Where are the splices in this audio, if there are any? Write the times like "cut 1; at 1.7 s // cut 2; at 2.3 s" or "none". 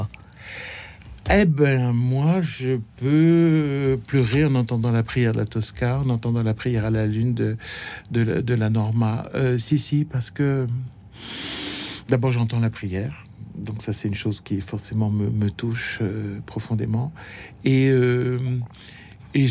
none